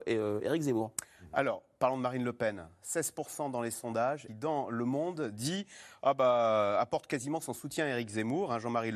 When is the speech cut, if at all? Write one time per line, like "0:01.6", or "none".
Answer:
0:04.3